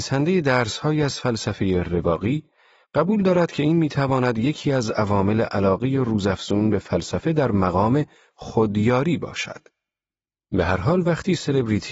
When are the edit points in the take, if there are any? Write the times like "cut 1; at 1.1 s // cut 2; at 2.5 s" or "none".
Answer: none